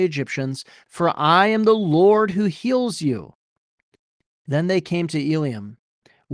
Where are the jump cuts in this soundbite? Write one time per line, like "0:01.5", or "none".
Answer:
none